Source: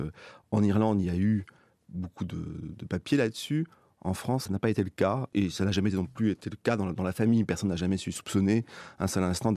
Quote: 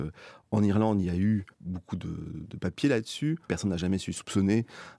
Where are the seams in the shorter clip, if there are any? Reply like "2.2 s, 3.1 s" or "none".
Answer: 1.5 s, 3.5 s